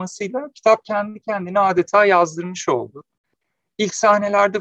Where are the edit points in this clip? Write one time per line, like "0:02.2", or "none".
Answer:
none